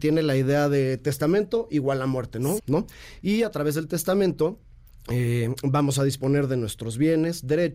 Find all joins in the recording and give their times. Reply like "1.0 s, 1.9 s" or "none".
2.6 s